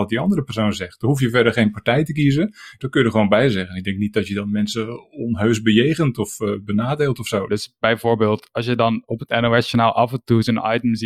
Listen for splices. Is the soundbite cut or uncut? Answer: cut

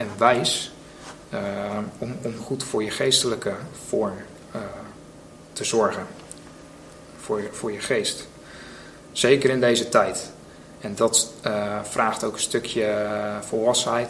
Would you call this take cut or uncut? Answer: uncut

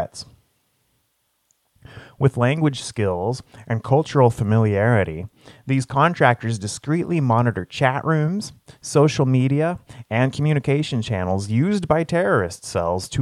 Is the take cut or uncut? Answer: uncut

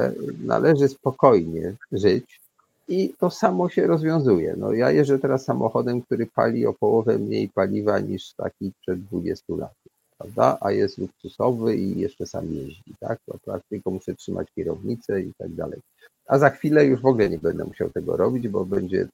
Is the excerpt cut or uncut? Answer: uncut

